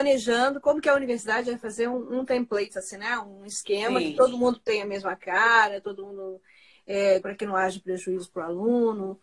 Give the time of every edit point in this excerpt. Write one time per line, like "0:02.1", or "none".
0:07.2